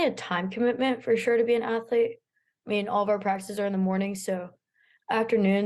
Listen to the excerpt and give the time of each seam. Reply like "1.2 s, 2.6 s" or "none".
none